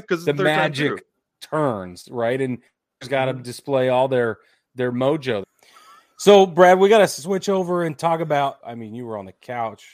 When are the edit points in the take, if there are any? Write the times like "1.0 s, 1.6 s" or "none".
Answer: 8.6 s